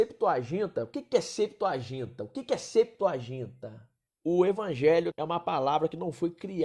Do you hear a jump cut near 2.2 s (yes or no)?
no